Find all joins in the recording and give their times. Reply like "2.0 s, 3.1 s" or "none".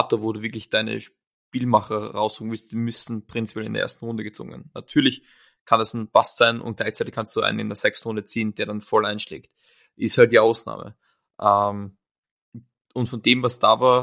none